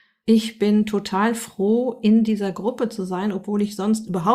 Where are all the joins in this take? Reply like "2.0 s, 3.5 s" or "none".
none